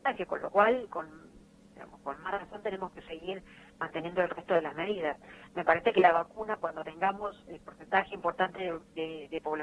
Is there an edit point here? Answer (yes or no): no